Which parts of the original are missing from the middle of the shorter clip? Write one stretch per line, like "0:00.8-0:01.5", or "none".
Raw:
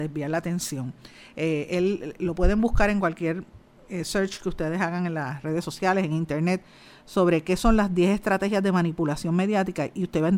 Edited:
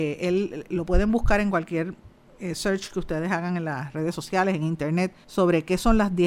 0:06.7-0:07.0